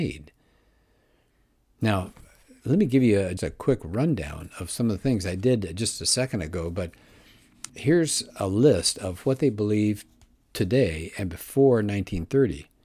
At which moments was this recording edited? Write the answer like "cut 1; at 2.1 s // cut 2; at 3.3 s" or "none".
cut 1; at 3.4 s // cut 2; at 7.7 s